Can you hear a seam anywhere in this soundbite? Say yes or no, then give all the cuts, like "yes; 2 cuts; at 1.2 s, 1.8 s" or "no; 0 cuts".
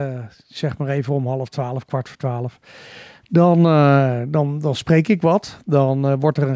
no; 0 cuts